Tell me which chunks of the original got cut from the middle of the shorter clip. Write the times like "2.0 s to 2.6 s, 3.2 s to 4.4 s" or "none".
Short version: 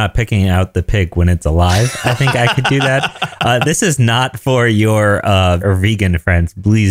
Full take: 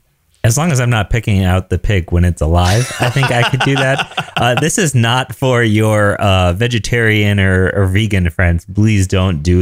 6.6 s to 7.7 s